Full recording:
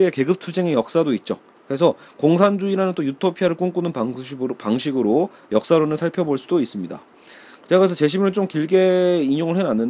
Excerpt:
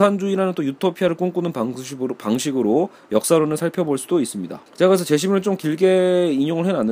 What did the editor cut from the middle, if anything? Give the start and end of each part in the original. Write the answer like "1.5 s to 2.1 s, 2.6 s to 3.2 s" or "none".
7.1 s to 7.6 s